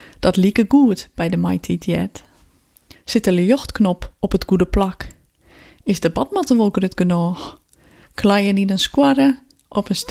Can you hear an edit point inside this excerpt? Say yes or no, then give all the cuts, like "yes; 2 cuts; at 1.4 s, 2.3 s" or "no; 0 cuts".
yes; 2 cuts; at 2.9 s, 8.0 s